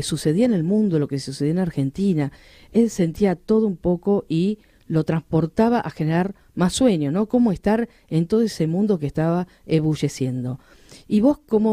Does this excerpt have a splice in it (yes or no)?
no